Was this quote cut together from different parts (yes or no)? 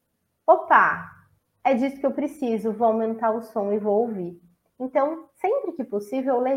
no